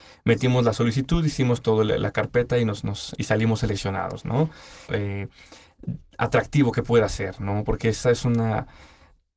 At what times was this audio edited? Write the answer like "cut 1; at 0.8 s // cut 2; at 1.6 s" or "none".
cut 1; at 4.9 s // cut 2; at 8.0 s